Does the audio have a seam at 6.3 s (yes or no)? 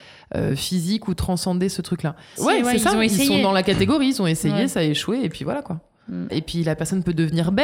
yes